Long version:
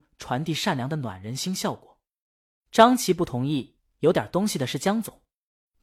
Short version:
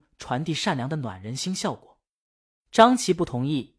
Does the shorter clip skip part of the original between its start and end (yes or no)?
no